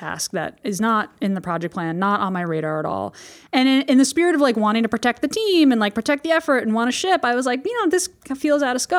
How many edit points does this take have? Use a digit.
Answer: 0